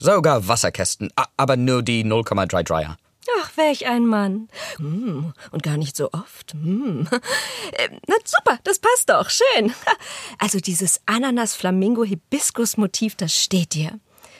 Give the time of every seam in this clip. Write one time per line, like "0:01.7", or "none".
0:04.8